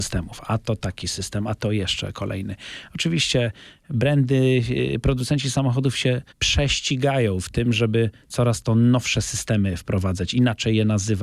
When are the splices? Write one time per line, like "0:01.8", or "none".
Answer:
0:06.3